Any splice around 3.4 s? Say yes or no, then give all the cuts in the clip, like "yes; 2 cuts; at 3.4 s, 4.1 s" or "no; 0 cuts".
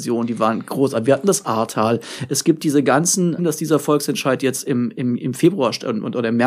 yes; 1 cut; at 3.4 s